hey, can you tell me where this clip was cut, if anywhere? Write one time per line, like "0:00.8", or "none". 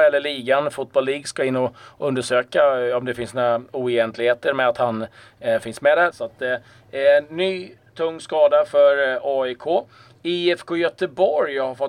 0:06.1